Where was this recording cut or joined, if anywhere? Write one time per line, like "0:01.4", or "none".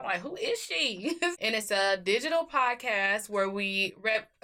0:01.3